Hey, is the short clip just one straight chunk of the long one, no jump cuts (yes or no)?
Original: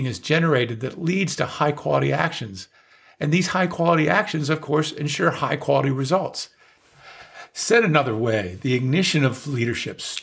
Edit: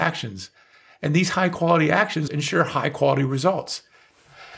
no